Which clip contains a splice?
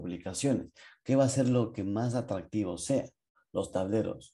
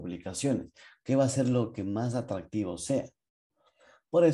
first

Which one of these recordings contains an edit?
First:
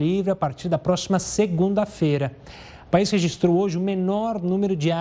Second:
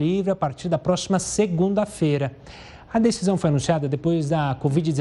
first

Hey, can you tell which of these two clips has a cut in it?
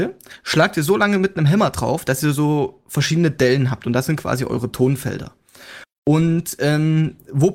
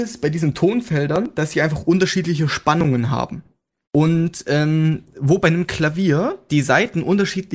second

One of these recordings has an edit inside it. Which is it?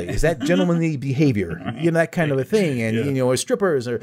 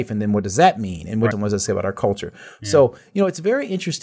second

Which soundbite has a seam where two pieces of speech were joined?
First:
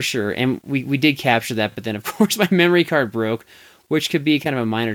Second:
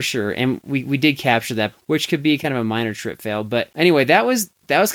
second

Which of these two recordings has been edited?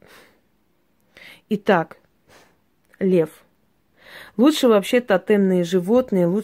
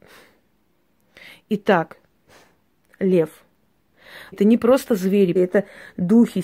second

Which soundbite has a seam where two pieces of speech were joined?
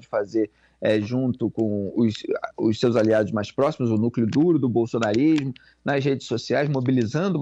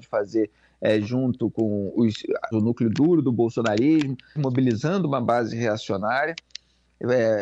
second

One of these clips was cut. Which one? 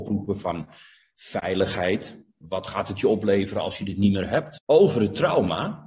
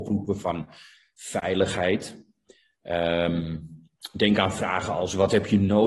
first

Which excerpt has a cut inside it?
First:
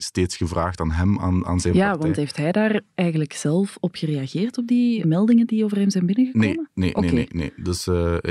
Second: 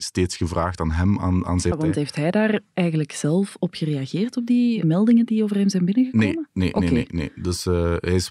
second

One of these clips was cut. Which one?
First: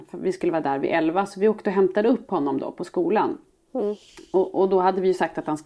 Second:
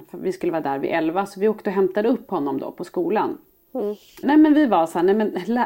second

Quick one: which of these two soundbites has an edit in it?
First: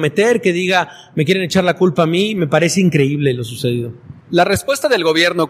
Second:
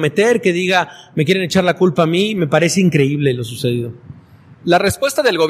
first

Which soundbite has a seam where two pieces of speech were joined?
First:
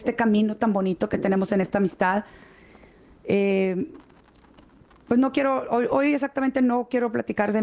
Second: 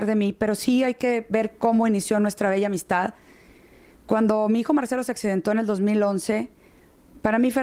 first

